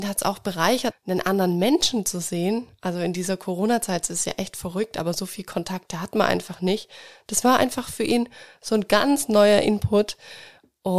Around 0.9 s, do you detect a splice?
yes; 1 cut; at 0.9 s

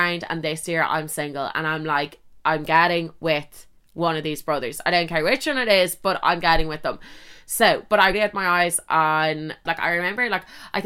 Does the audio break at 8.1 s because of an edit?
yes; 2 cuts; at 8.1 s, 9.7 s

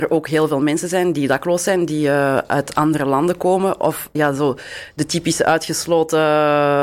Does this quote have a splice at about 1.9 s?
no; 1 cut; at 4.1 s

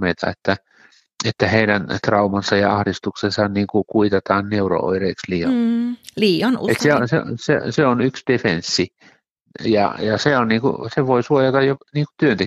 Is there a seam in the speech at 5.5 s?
no; 0 cuts

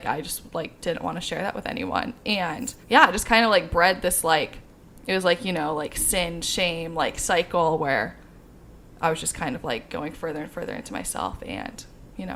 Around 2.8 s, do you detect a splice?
yes; 1 cut; at 2.8 s

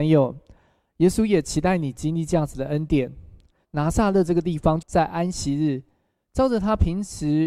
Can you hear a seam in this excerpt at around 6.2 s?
no; 2 cuts; at 3.6 s, 4.8 s

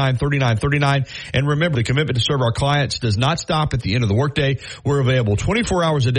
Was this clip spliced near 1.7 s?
yes; 1 cut; at 1.7 s

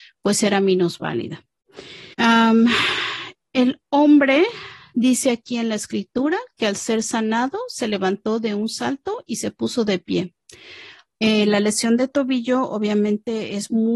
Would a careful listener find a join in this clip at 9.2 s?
no; 2 cuts; at 2.1 s, 11.2 s

